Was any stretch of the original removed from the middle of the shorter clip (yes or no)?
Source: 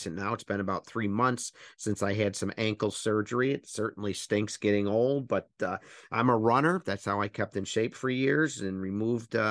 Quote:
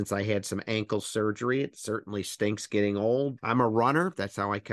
yes